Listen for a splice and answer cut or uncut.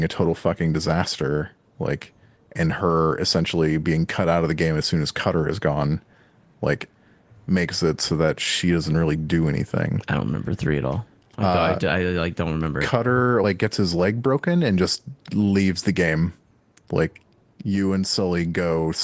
uncut